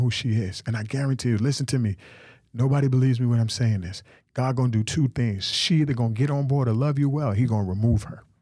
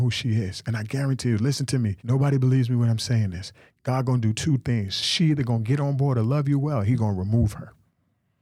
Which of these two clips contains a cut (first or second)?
second